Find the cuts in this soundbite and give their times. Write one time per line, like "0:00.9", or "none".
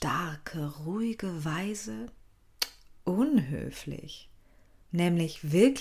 0:04.8